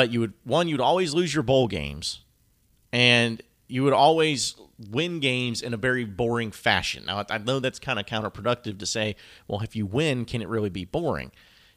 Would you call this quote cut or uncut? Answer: uncut